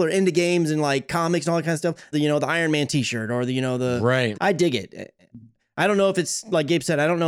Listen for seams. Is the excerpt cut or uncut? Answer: cut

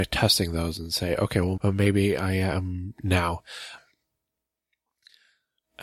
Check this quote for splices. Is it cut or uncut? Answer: cut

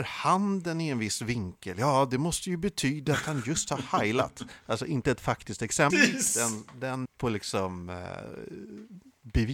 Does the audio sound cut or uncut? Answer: cut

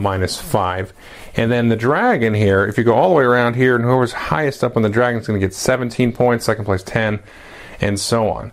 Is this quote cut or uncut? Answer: uncut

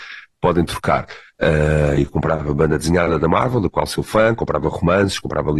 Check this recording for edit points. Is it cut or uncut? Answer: cut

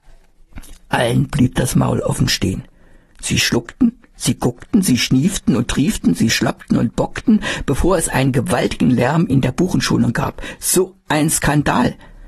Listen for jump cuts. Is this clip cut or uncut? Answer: uncut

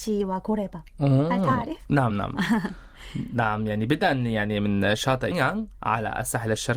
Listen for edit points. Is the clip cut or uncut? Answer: cut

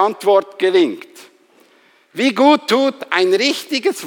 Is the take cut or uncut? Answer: uncut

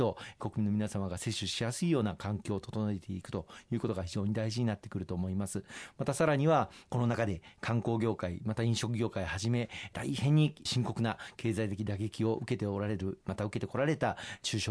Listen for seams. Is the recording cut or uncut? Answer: uncut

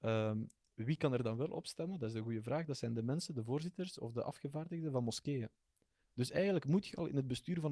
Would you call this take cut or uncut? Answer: uncut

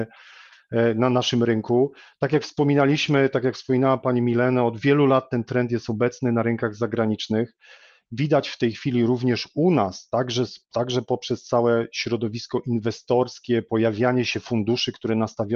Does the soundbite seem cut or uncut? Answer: uncut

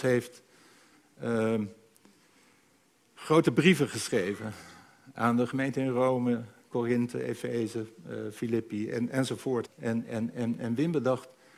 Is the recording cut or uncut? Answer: cut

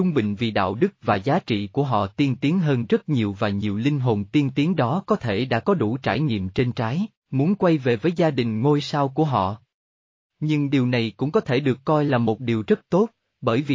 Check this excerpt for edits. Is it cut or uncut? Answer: cut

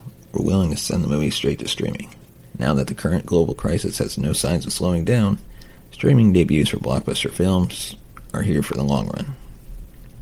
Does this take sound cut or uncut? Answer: cut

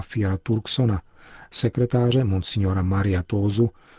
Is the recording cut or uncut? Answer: uncut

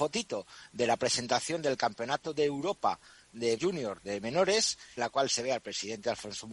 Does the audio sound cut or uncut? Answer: cut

